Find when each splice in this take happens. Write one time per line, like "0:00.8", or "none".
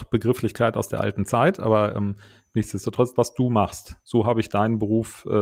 0:03.2